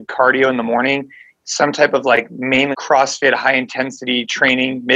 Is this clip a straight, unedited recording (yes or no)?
no